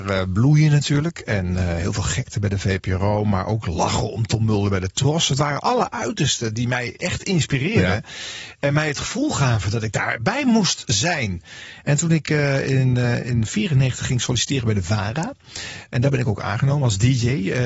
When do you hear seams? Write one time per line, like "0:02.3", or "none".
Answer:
none